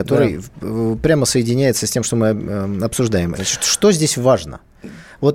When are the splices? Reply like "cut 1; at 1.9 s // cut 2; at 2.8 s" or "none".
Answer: cut 1; at 3.3 s